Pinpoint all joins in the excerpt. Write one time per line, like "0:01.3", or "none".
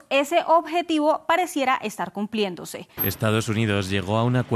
0:03.0